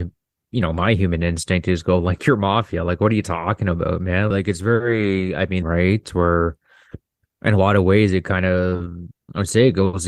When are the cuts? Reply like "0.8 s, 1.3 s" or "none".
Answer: 4.3 s, 5.6 s